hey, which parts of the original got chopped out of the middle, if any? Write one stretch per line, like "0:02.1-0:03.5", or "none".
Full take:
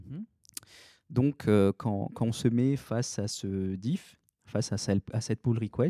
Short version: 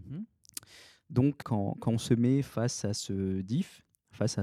0:01.4-0:01.8